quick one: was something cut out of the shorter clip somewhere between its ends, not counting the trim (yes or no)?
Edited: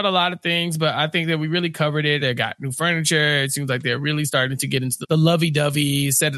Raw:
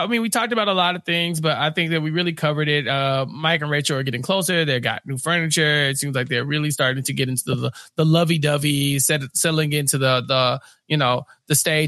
yes